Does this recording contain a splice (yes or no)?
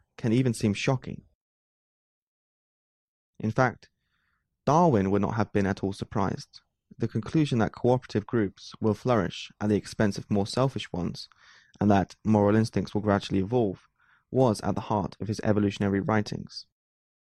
yes